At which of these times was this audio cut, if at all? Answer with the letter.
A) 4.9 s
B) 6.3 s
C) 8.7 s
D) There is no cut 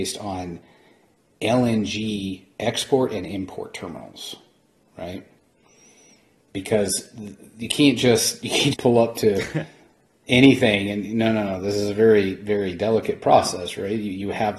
C